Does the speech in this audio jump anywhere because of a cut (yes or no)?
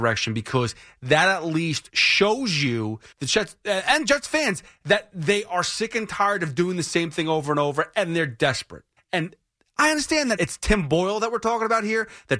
yes